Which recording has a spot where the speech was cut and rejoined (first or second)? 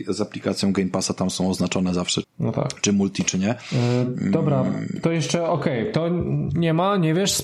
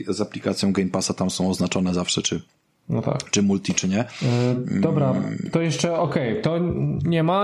first